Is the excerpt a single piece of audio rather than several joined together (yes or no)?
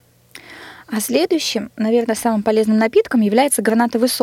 yes